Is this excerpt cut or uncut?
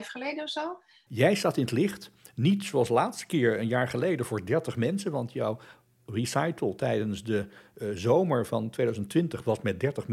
cut